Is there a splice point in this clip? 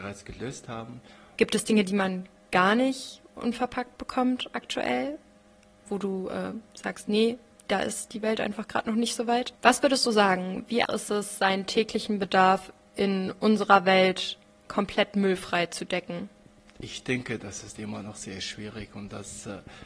yes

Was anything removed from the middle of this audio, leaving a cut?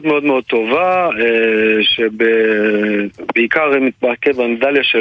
no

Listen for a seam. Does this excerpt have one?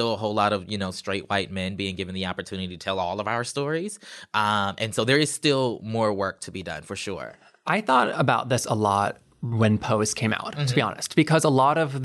no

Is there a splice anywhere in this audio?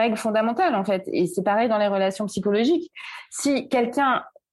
no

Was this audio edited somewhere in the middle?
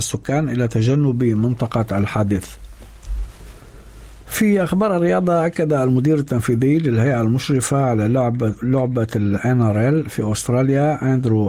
no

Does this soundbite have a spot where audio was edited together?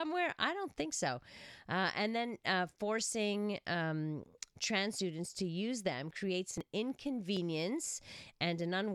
no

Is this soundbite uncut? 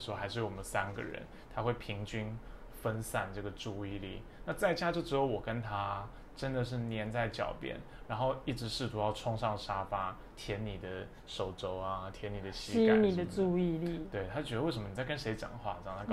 yes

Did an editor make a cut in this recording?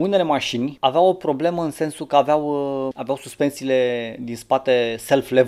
yes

